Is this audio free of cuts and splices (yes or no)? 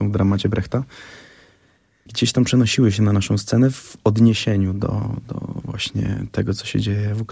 yes